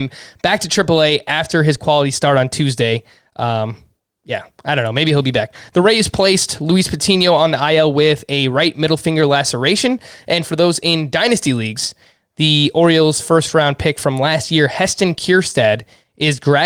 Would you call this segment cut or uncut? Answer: uncut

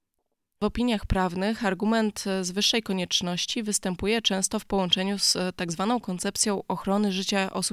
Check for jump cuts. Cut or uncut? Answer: uncut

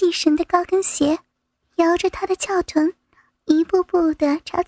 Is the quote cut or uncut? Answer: uncut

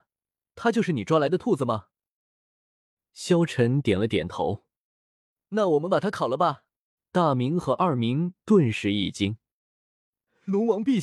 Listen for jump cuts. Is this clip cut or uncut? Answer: cut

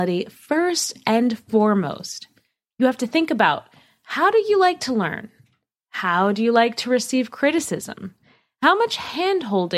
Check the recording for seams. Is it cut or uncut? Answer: uncut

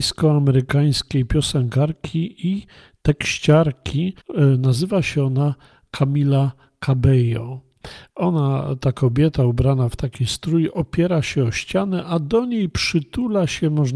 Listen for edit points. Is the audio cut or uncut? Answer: cut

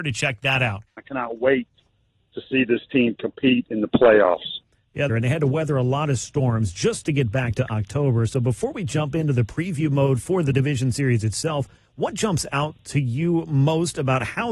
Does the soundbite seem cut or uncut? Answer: cut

